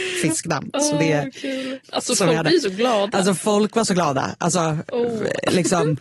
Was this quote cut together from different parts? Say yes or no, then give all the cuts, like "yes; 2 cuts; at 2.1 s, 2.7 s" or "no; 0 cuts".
yes; 1 cut; at 1.8 s